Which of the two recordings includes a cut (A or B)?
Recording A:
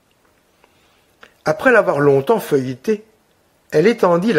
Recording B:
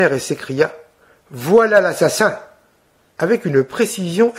B